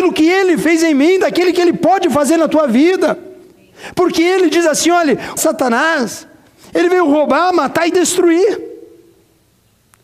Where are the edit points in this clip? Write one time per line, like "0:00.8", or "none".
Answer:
0:05.4